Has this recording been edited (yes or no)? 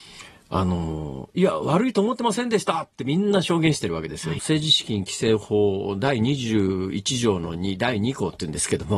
yes